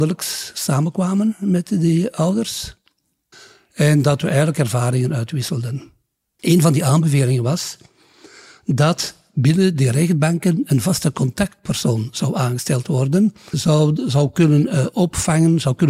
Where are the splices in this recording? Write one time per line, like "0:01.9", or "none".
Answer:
0:06.4
0:13.5